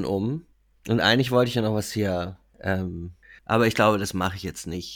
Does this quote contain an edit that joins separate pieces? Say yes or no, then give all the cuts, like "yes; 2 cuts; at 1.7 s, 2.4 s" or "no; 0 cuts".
yes; 1 cut; at 3.4 s